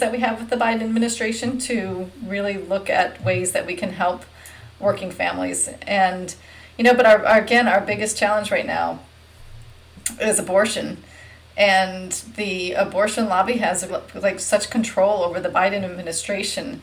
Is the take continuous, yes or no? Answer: no